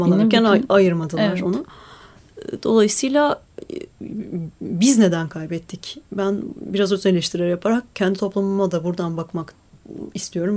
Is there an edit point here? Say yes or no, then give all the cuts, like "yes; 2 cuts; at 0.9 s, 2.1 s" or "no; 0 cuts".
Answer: no; 0 cuts